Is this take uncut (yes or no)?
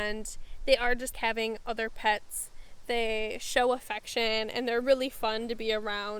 no